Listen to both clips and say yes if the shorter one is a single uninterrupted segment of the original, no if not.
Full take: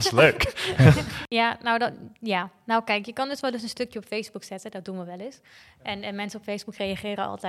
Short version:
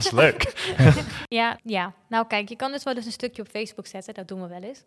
no